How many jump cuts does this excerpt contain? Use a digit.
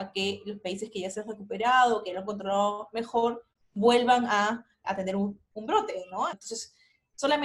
2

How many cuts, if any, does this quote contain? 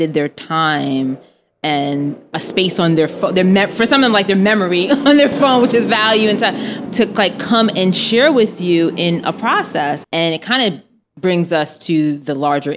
2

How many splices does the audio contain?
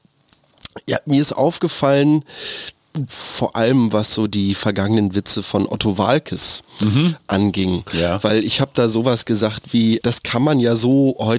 2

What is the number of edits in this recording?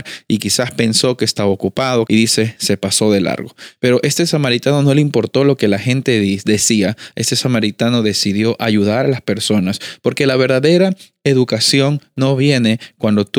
2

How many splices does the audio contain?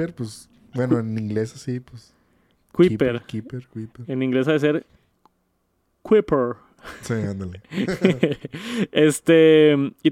0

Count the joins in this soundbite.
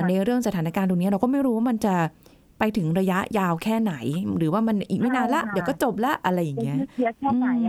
0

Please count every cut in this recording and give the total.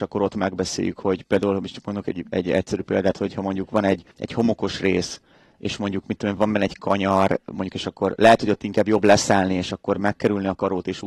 2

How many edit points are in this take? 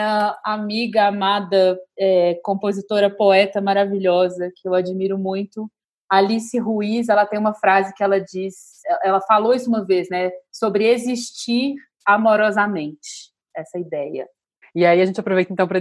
1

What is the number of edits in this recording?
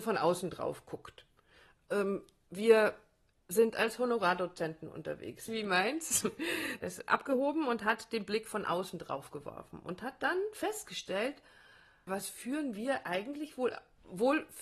3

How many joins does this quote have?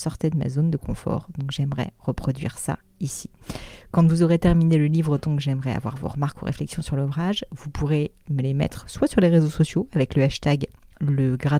0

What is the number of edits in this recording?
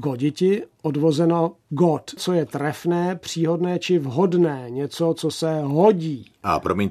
1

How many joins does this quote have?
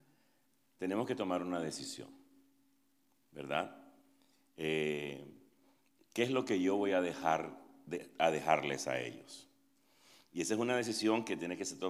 0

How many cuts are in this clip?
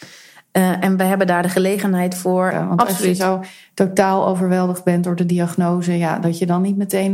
1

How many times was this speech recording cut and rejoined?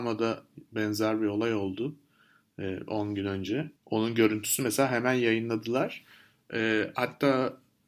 1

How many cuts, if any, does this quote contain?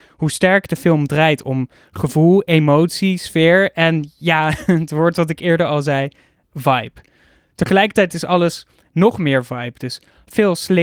0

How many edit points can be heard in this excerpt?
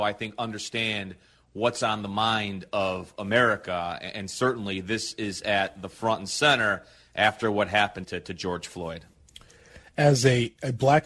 1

